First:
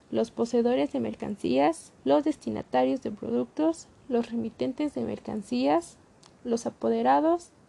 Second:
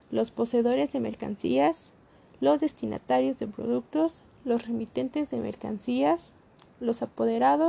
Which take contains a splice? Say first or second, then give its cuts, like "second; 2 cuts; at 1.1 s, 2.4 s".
first; 1 cut; at 2.0 s